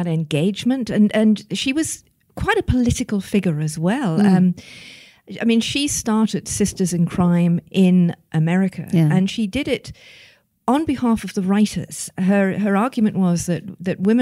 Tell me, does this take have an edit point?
no; 0 cuts

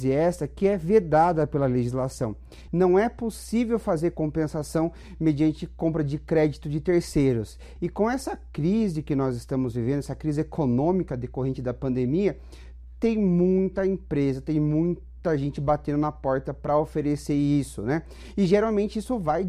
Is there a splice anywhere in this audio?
yes; 2 cuts; at 2.7 s, 7.8 s

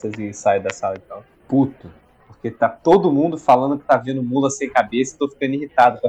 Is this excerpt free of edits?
yes; 0 cuts

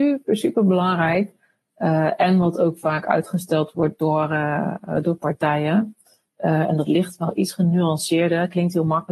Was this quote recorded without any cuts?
yes; 0 cuts

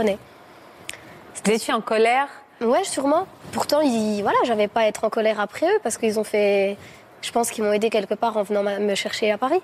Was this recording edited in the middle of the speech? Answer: no; 0 cuts

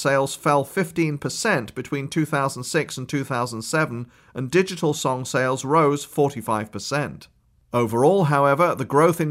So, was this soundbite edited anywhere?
no; 0 cuts

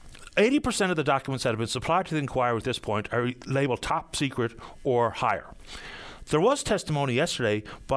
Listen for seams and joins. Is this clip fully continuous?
yes; 0 cuts

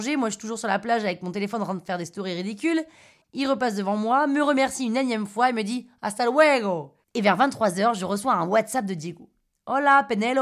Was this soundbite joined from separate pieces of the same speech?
yes; 1 cut; at 7.0 s

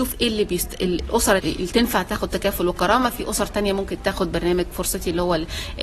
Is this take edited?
yes; 1 cut; at 1.4 s

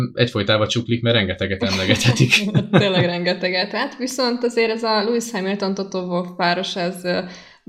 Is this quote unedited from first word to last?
yes; 0 cuts

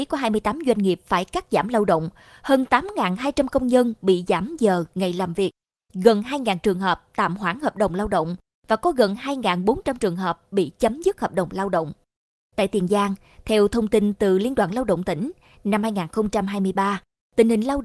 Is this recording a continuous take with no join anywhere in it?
no; 2 cuts; at 5.9 s, 12.4 s

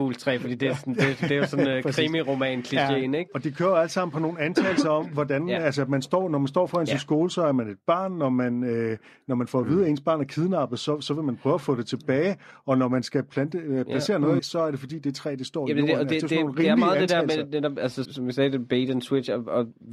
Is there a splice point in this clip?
yes; 2 cuts; at 14.4 s, 18.0 s

